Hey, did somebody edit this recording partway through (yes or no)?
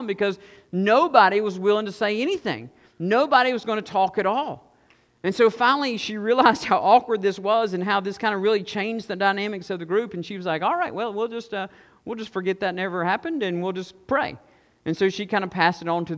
no